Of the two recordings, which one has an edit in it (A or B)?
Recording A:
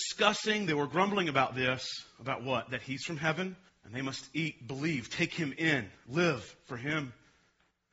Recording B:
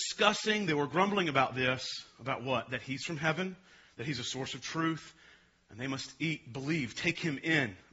A